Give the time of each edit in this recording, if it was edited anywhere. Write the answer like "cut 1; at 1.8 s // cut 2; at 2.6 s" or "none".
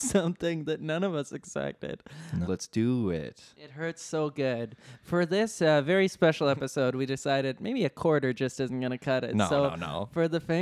cut 1; at 2.4 s